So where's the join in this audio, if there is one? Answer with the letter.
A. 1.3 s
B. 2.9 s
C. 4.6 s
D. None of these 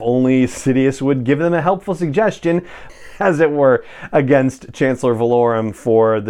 B